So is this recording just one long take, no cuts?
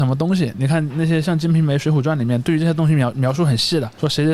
yes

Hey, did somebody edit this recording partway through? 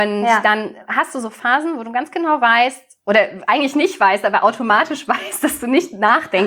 no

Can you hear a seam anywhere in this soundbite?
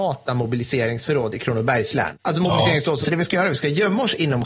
yes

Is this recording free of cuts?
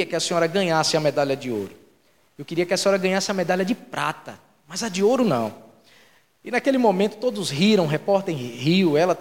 yes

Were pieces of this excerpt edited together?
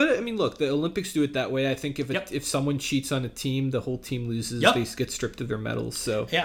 no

